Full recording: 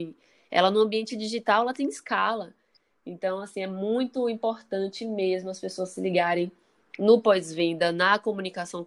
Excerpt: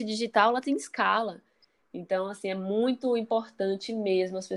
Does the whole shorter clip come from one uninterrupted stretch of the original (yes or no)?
yes